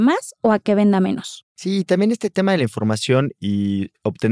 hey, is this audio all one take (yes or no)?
no